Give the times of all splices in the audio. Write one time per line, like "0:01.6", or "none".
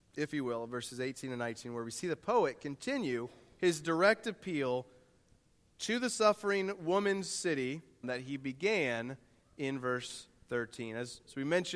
0:08.0